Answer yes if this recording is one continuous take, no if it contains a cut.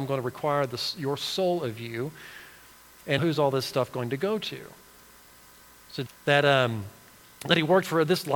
no